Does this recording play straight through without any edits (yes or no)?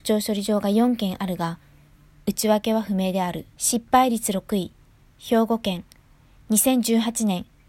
no